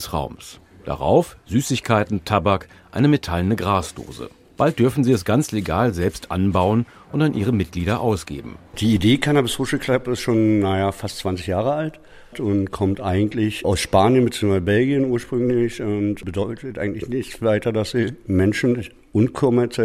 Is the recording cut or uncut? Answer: uncut